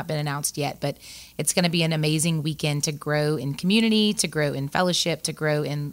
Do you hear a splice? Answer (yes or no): no